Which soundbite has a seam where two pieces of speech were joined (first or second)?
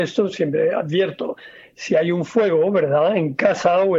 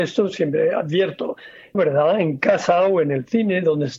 second